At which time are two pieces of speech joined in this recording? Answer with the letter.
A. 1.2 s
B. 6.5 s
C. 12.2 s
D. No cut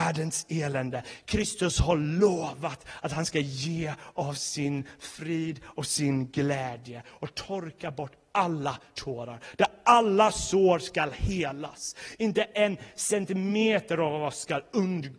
D